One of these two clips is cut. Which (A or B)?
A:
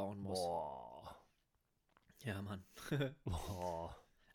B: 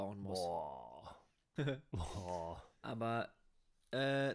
B